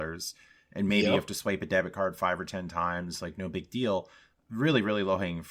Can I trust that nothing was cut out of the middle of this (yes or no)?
yes